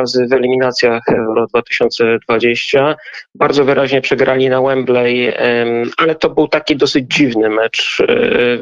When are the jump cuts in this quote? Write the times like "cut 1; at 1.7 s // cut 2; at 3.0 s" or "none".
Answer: none